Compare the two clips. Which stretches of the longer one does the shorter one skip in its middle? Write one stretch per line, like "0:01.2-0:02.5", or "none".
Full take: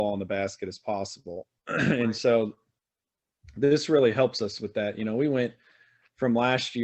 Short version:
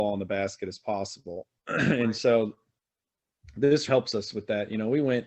0:03.9-0:04.1